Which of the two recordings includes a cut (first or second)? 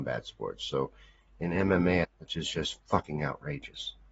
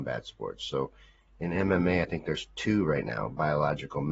first